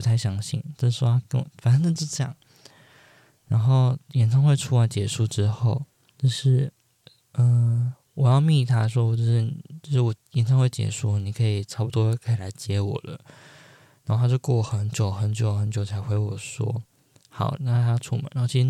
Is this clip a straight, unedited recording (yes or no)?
no